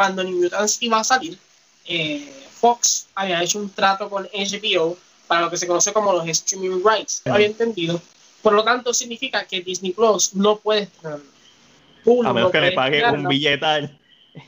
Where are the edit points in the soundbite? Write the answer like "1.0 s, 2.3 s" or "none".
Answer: 7.3 s